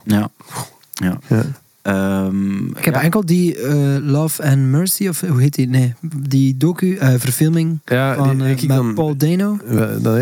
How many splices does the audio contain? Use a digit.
2